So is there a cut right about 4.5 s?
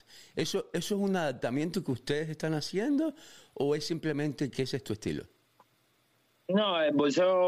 yes; 1 cut; at 4.5 s

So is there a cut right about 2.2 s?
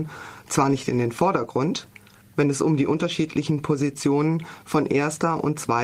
yes; 1 cut; at 2.2 s

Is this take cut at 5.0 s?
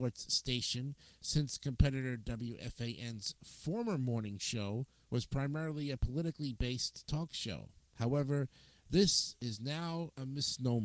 yes; 1 cut; at 5.0 s

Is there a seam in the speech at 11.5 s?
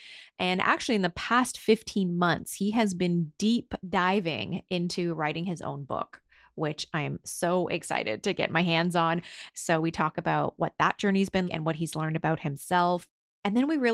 yes; 2 cuts; at 9.5 s, 11.5 s

